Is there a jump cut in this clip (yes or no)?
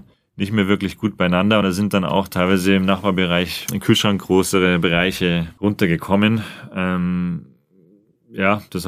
no